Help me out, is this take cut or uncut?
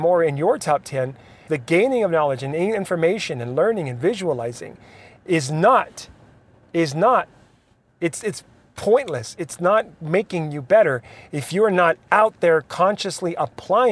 cut